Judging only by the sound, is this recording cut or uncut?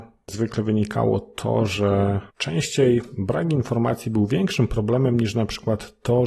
cut